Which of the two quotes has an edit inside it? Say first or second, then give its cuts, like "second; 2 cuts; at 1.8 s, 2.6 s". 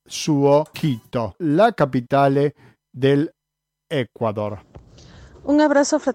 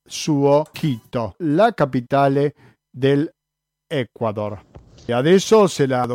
second; 1 cut; at 5.1 s